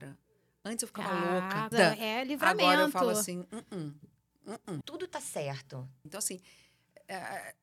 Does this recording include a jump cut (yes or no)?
yes